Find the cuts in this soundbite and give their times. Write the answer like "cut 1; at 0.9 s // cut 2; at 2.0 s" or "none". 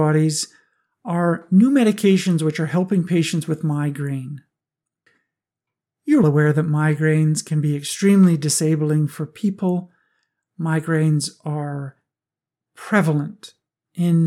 cut 1; at 6.2 s